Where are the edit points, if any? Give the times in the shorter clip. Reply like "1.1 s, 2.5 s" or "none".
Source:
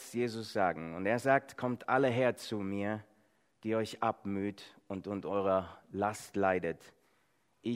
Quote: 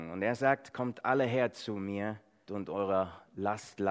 2.5 s